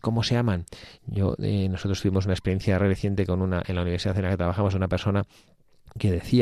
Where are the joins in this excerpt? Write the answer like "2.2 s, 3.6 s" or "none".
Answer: 1.0 s